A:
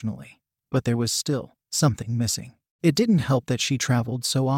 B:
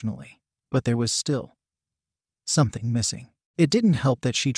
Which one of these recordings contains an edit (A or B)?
A